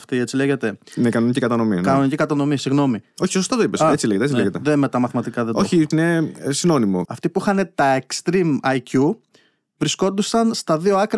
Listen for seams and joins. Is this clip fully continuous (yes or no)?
no